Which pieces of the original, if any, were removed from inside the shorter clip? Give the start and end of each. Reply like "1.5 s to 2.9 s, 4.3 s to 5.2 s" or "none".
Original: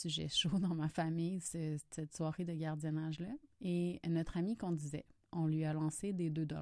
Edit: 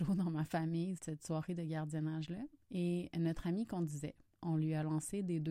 1.4 s to 1.9 s